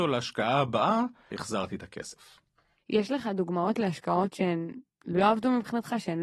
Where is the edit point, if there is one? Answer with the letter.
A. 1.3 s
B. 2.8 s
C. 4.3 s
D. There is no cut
A